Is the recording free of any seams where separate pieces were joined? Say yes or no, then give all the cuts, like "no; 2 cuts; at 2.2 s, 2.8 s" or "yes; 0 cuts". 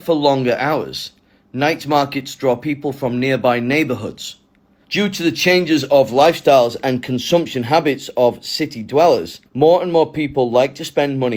no; 2 cuts; at 4.8 s, 9.5 s